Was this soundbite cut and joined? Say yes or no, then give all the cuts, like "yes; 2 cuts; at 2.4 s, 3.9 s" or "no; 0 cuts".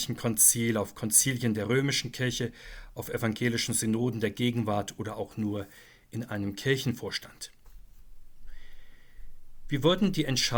no; 0 cuts